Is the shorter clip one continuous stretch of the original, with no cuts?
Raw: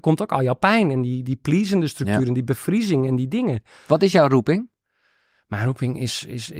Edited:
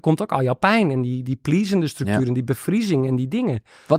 yes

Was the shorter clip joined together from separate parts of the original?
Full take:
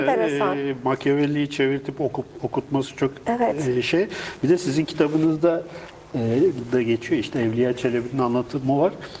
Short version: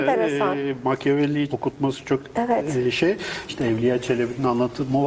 yes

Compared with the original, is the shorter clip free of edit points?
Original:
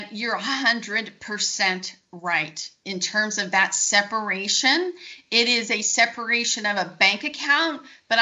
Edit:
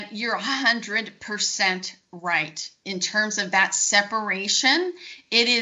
yes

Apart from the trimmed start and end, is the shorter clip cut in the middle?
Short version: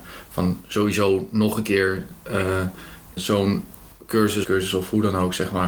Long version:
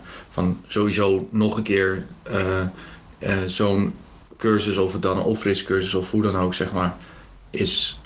yes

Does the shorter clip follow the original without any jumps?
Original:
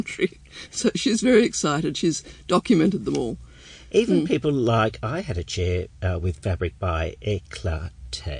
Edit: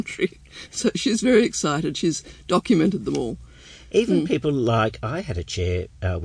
yes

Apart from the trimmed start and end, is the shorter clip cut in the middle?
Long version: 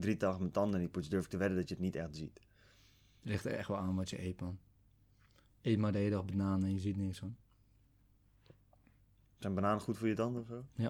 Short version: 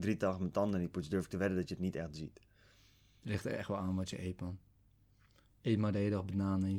no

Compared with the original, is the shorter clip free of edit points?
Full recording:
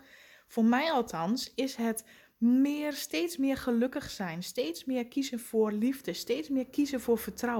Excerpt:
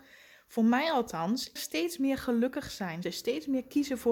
no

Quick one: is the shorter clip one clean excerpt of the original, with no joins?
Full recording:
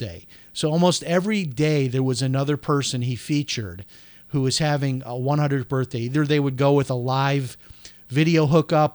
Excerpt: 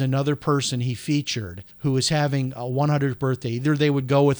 no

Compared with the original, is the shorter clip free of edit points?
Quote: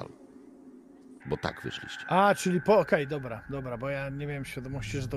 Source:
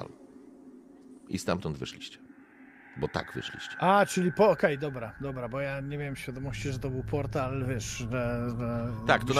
no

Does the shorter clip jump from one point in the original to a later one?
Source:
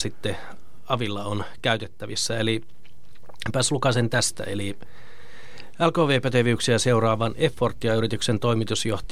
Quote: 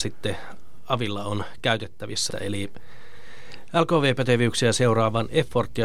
yes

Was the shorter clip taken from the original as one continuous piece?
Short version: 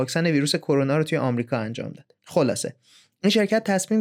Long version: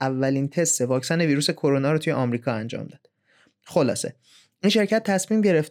no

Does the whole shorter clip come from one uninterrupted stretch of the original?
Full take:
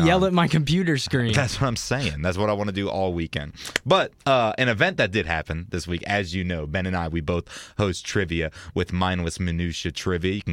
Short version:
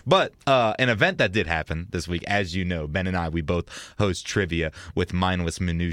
yes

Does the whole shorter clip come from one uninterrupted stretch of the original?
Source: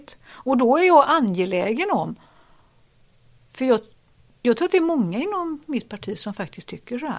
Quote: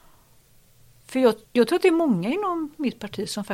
no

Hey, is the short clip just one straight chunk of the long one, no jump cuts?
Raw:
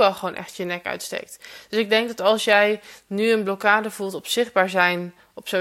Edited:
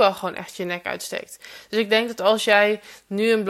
yes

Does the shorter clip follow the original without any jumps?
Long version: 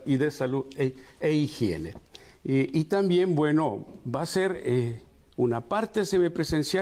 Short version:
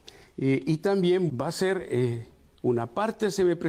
no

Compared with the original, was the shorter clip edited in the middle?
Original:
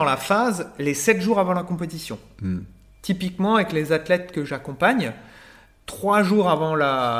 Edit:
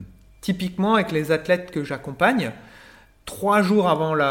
no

